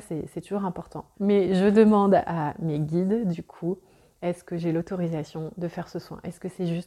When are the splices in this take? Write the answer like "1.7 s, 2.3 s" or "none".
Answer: 1.1 s